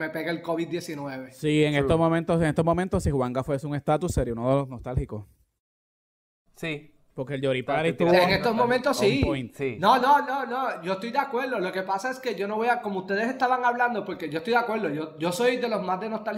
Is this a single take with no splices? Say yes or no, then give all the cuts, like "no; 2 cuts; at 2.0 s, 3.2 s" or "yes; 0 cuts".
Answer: yes; 0 cuts